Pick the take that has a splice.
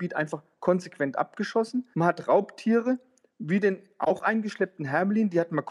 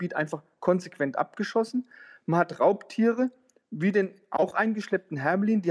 first; 1 cut; at 1.9 s

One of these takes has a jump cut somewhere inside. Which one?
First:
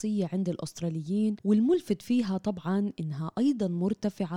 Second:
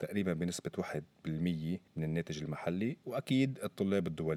second; 1 cut; at 1.9 s

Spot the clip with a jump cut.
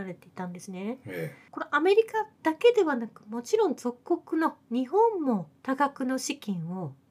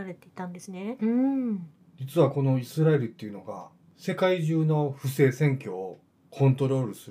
second; 1 cut; at 1.0 s

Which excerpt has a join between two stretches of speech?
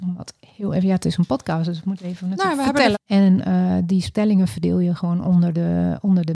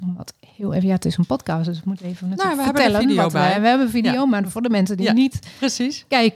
first; 1 cut; at 2.9 s

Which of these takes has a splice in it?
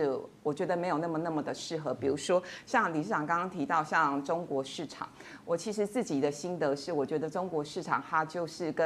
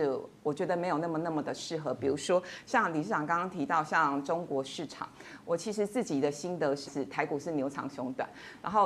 second; 1 cut; at 6.9 s

